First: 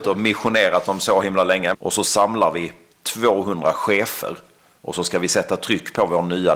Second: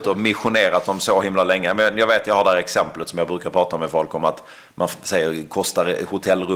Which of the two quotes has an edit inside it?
first; 1 cut; at 1.7 s

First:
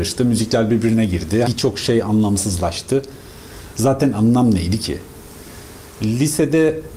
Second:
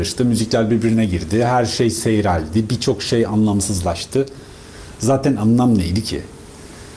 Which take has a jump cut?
first; 1 cut; at 1.4 s

